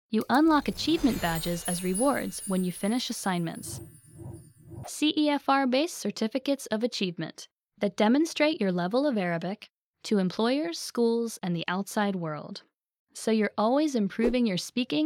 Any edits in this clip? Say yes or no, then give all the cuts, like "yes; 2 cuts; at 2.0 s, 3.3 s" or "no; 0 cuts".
yes; 2 cuts; at 4.8 s, 13.0 s